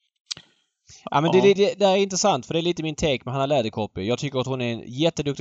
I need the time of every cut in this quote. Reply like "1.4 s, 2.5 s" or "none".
1.6 s